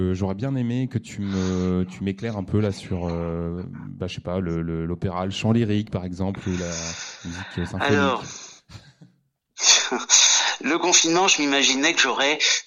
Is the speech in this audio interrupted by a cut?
no; 0 cuts

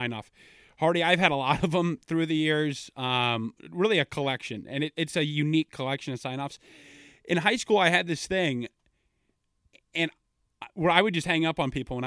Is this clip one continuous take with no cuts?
yes; 0 cuts

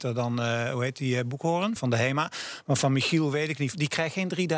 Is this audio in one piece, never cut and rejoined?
no; 1 cut; at 1.8 s

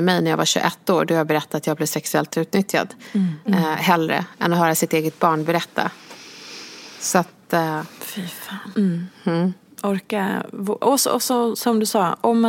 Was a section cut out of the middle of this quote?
yes; 2 cuts; at 3.5 s, 8.7 s

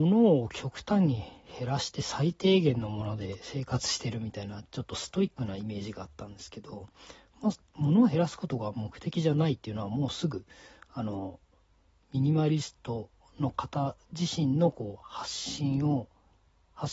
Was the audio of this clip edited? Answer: no; 0 cuts

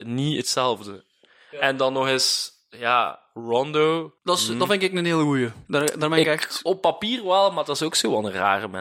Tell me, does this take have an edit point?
yes; 1 cut; at 4.2 s

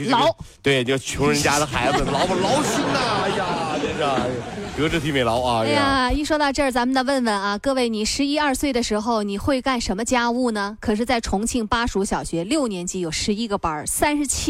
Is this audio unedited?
yes; 0 cuts

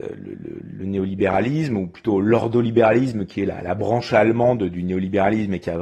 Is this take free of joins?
yes; 0 cuts

